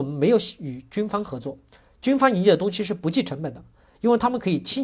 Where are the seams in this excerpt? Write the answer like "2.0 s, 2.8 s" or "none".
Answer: none